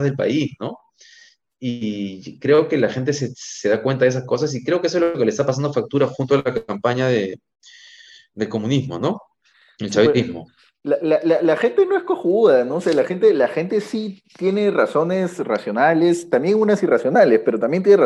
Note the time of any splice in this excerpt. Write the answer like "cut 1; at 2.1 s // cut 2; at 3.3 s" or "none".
none